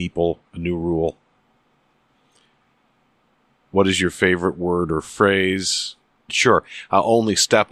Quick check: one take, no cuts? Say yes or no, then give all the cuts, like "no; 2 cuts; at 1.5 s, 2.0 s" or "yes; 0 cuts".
no; 1 cut; at 6.3 s